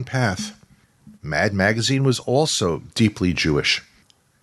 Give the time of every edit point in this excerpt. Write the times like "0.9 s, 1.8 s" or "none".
none